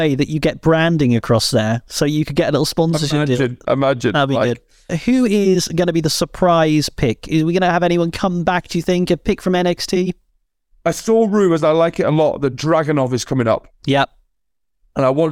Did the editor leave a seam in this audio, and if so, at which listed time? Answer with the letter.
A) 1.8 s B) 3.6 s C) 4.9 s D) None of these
C